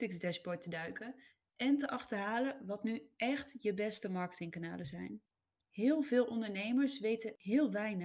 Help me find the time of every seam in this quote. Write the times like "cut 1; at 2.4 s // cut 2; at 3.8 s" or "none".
cut 1; at 5.6 s